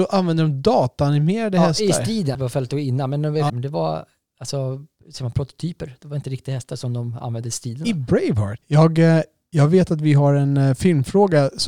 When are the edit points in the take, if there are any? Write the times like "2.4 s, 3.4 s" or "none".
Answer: 2.3 s, 3.5 s, 8.6 s